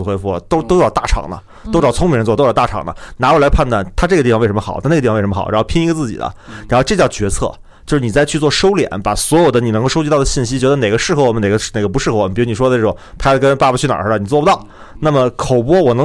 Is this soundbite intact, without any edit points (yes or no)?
yes